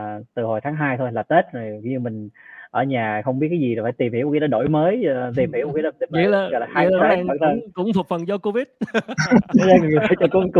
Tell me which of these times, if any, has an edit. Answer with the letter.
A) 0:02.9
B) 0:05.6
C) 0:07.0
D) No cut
C